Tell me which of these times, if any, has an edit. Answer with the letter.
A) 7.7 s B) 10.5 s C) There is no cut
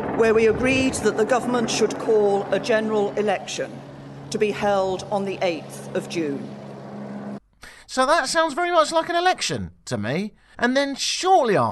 B